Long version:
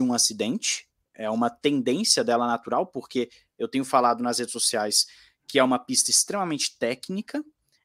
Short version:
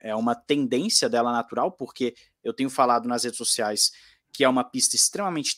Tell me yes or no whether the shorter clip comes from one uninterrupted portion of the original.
yes